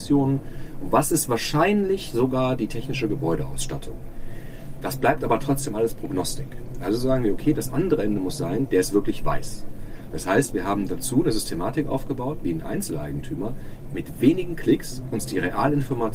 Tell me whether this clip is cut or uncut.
cut